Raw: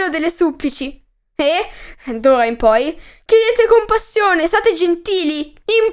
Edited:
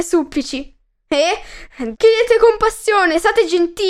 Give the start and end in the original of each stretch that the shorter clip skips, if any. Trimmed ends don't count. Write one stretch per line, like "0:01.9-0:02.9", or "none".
0:02.2-0:03.2